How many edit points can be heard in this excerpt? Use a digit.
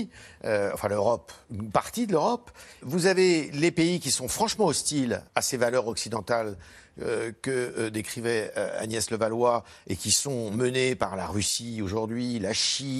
3